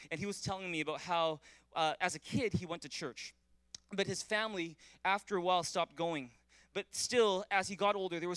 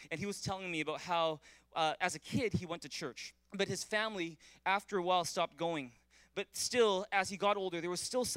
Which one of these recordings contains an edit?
second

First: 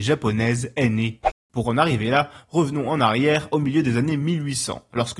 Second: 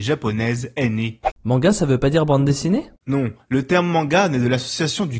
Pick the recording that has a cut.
second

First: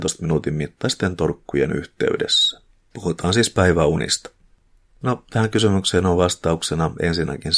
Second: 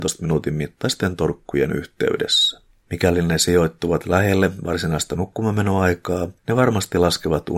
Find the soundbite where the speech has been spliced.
second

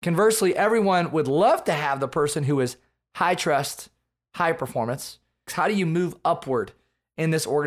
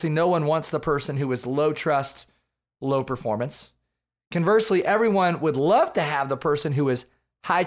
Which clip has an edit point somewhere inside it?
first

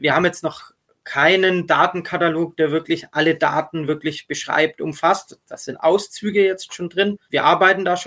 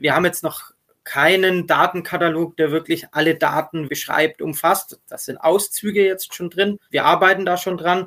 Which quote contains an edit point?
second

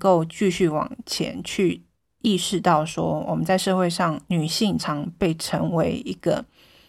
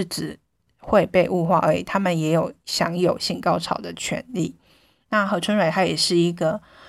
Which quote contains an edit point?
first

